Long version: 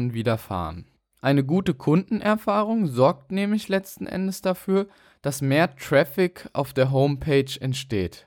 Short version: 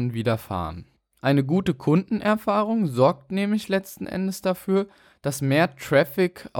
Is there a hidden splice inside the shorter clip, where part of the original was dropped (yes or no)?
no